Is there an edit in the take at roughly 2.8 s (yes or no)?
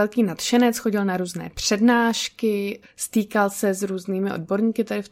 yes